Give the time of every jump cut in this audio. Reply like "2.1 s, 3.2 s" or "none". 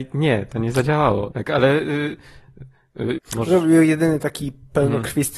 1.3 s, 3.2 s